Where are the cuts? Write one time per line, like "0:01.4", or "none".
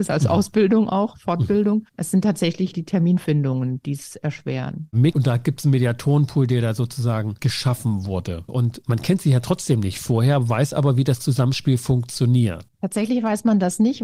0:05.1
0:08.5